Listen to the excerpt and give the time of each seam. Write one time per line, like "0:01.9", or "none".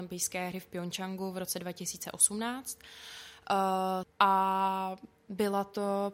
0:04.0